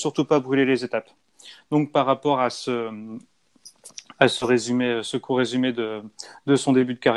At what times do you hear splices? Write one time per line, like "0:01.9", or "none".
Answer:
none